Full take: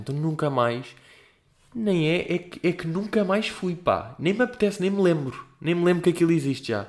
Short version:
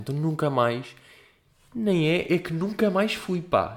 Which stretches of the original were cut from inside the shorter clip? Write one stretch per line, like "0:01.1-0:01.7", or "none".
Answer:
0:02.3-0:02.6

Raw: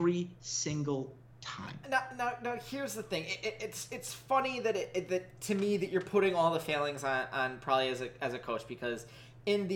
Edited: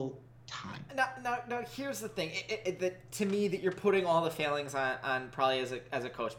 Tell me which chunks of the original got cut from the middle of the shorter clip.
0:03.6-0:04.9

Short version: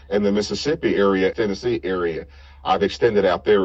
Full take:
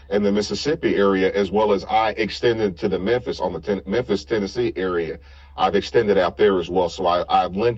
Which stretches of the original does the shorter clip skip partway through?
0:01.3-0:04.3

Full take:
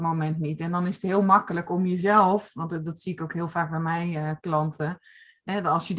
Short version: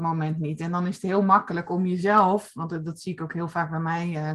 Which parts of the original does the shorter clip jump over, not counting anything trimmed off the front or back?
none

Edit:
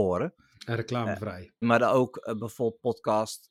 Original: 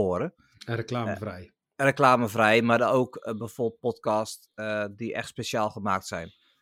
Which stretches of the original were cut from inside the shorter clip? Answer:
0:01.6-0:02.6

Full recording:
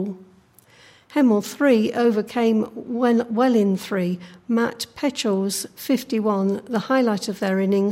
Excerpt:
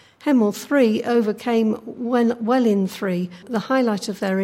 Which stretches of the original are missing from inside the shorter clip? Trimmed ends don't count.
0:04.3-0:06.6

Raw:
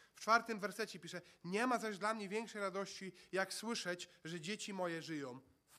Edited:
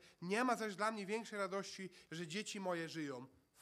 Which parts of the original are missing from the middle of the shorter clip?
0:03.3-0:04.2

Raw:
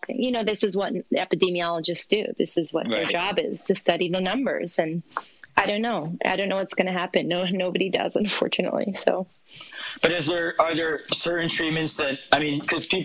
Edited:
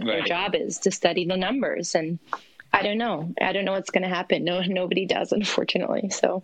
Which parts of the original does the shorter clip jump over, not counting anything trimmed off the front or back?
none

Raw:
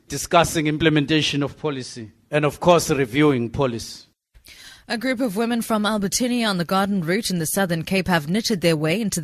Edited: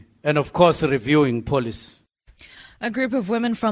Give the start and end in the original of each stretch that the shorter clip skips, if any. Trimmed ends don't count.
none

